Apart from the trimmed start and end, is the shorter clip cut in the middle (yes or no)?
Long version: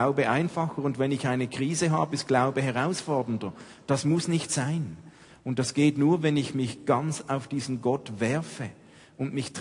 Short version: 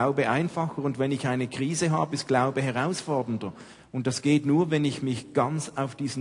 yes